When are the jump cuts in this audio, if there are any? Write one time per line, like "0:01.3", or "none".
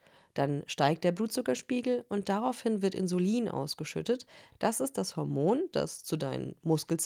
none